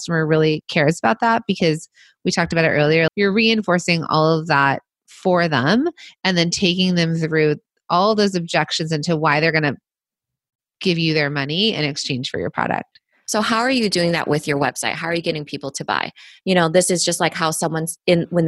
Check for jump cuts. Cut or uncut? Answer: cut